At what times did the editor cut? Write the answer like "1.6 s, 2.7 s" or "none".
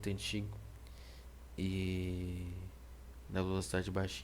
3.2 s